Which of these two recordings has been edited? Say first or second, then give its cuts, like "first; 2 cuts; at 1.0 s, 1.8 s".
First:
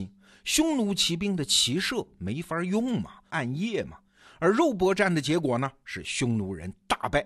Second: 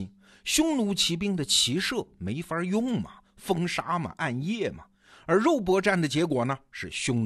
first; 1 cut; at 3.3 s